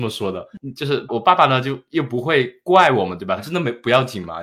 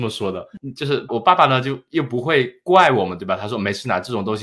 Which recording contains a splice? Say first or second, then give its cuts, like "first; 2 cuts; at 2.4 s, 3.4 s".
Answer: first; 1 cut; at 3.4 s